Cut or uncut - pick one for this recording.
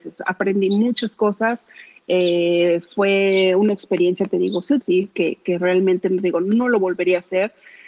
cut